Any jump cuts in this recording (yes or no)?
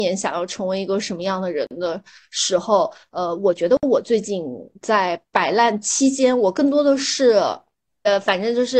yes